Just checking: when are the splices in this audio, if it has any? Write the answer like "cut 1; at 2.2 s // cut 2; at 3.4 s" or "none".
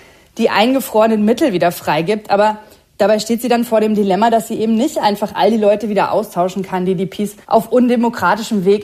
cut 1; at 7.4 s